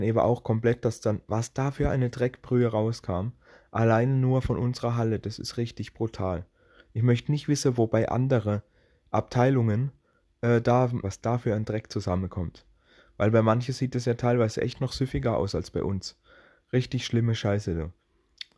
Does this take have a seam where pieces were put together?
yes; 1 cut; at 11.0 s

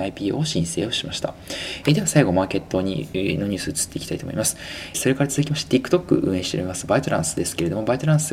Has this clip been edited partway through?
yes; 2 cuts; at 1.8 s, 4.9 s

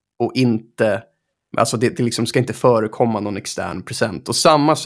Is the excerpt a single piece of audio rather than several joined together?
no; 1 cut; at 1.5 s

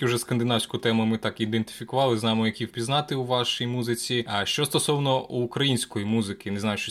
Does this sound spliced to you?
no; 0 cuts

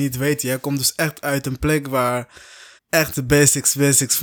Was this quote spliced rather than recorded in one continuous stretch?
yes; 1 cut; at 2.8 s

